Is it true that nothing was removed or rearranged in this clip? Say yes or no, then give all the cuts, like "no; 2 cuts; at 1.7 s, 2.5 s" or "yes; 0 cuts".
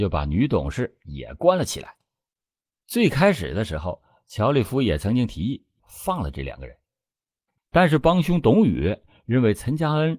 no; 1 cut; at 5.8 s